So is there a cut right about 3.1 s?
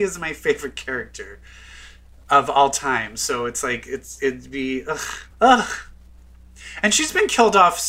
no; 1 cut; at 5.3 s

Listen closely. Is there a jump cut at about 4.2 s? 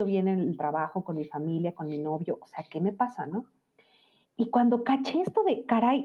yes; 1 cut; at 4.2 s

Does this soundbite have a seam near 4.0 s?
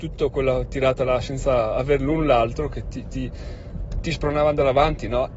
yes; 1 cut; at 4.0 s

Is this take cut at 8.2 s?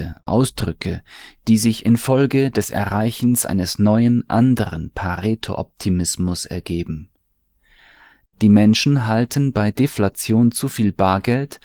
yes; 1 cut; at 8.2 s

